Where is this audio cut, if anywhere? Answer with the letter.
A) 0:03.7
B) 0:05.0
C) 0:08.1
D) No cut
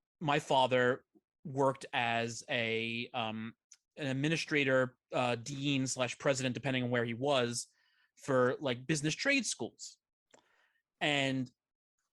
D